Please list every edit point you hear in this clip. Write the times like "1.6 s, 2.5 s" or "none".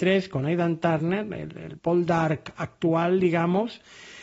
1.8 s